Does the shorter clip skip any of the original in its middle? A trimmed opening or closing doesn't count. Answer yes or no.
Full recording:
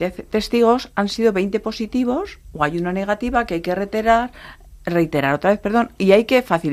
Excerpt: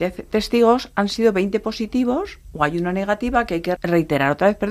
yes